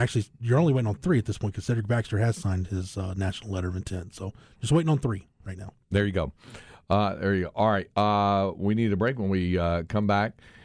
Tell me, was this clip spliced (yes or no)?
no